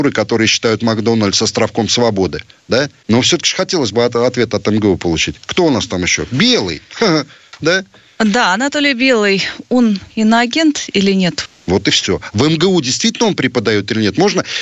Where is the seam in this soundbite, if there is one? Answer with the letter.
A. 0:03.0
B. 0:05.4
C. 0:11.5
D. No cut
C